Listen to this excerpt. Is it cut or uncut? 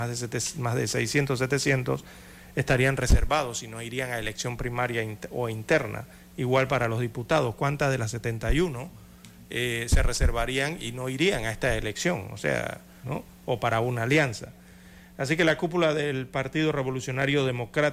cut